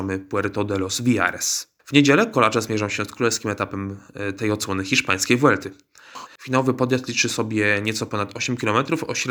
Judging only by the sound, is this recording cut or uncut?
cut